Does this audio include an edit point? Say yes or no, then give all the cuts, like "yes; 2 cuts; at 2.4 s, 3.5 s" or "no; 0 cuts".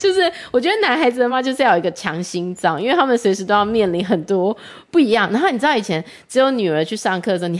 yes; 1 cut; at 1.3 s